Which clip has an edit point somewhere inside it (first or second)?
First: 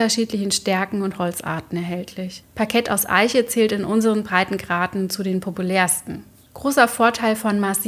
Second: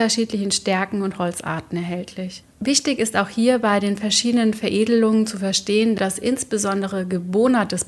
second